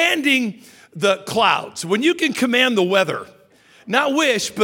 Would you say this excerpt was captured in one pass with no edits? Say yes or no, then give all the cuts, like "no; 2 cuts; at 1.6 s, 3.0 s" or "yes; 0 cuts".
yes; 0 cuts